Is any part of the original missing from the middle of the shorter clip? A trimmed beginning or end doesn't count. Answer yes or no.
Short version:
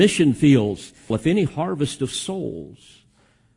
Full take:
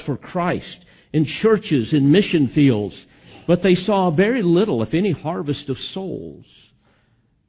yes